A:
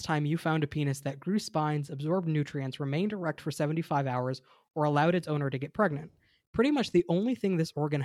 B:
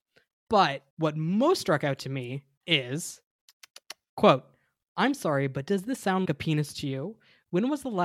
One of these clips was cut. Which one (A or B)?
B